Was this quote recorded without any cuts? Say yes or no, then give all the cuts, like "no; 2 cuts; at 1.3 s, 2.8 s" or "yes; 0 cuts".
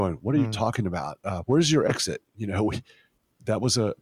yes; 0 cuts